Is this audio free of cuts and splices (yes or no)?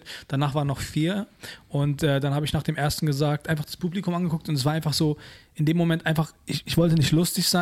yes